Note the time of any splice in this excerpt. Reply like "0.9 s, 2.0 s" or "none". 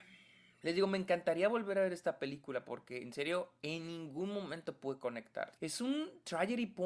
5.6 s